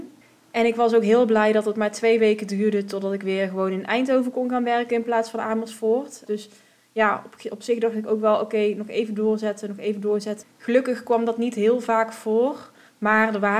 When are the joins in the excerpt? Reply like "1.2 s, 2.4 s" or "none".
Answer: 6.3 s, 10.4 s